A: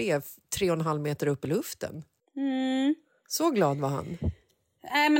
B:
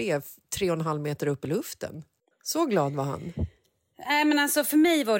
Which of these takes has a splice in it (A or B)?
B